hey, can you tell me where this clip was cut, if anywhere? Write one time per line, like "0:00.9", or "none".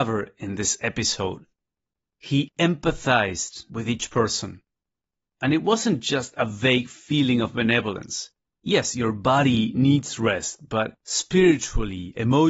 0:02.0
0:08.5

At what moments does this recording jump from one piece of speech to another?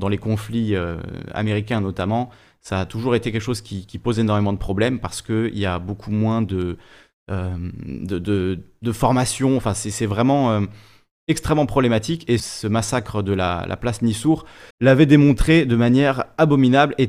0:12.4
0:14.7

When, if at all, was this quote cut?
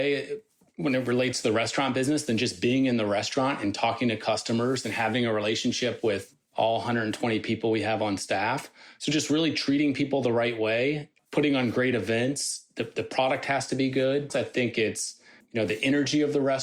0:11.2
0:14.3

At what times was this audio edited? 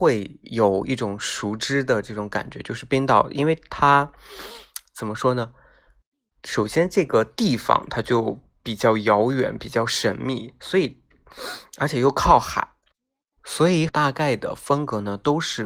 0:13.9

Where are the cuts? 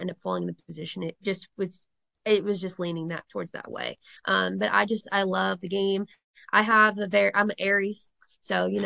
0:04.2

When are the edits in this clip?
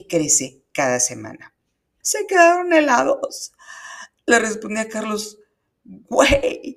0:02.0

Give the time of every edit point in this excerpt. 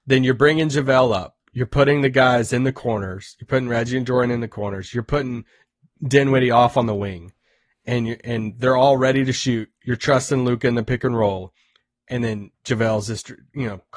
none

